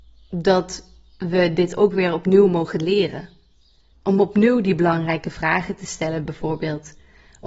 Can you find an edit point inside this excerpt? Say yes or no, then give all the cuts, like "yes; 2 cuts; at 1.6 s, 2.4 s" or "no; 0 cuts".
yes; 1 cut; at 3.9 s